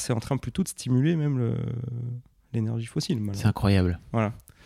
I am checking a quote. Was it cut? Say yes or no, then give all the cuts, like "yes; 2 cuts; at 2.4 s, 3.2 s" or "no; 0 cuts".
no; 0 cuts